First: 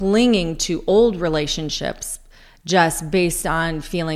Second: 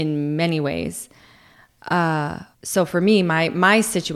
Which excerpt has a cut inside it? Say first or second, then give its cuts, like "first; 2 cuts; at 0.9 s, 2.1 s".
second; 1 cut; at 2.5 s